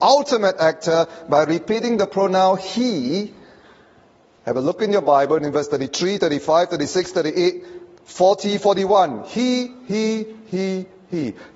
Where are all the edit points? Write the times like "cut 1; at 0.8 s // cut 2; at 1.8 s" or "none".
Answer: none

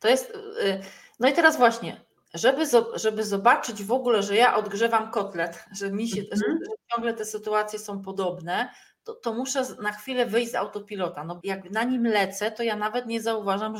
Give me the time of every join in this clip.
cut 1; at 11.4 s

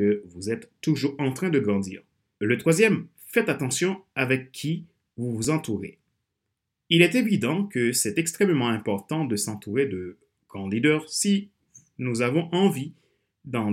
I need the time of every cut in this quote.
cut 1; at 2.4 s

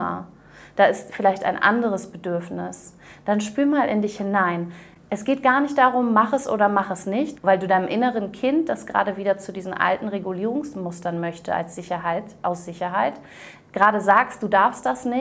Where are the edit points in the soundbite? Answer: cut 1; at 7.4 s

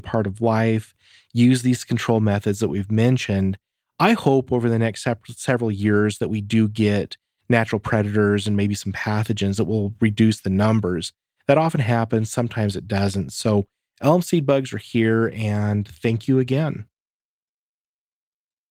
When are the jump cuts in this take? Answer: none

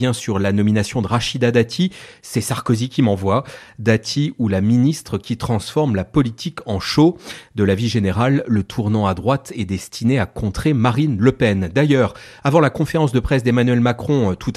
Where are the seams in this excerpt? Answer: none

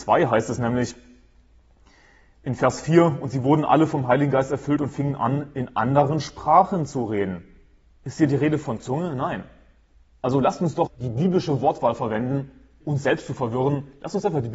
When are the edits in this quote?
cut 1; at 10.9 s // cut 2; at 12.8 s

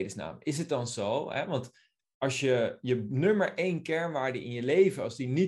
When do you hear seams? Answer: none

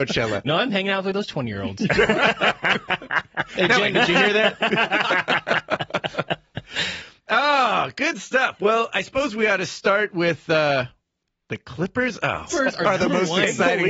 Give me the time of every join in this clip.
cut 1; at 3.9 s // cut 2; at 12.5 s

